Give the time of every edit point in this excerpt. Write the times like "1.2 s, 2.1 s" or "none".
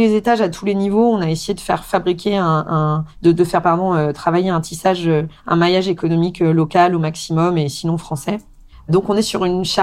8.7 s